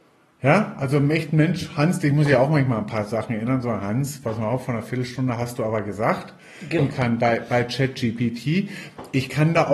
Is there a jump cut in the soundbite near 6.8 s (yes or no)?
yes